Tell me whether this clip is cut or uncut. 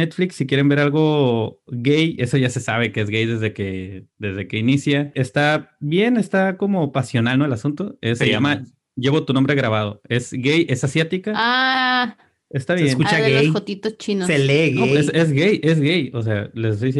cut